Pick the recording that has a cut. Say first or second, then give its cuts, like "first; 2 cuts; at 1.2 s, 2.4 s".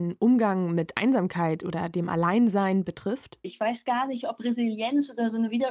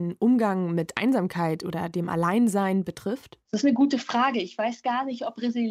first; 1 cut; at 3.4 s